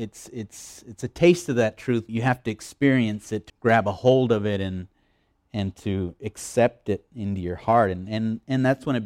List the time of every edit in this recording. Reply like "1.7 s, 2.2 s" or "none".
2.1 s, 3.5 s